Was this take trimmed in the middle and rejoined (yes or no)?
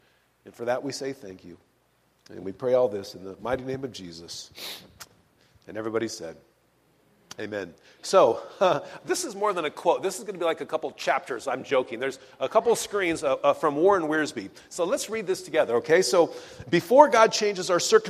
no